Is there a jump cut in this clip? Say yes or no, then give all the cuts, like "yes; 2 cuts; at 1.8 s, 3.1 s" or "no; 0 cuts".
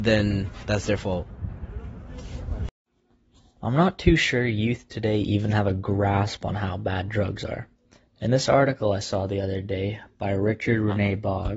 no; 0 cuts